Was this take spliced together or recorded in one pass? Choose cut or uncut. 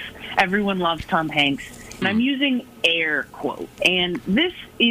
cut